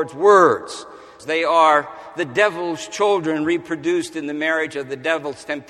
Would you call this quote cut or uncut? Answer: cut